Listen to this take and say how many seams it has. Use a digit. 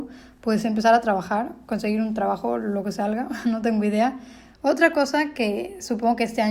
1